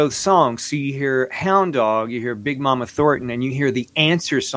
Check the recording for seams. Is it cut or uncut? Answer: uncut